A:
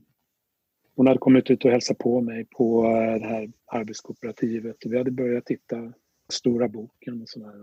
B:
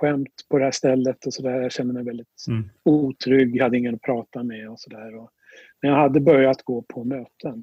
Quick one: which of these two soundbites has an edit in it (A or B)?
A